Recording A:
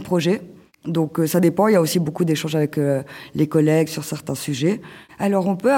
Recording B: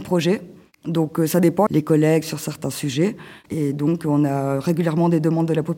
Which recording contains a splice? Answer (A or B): B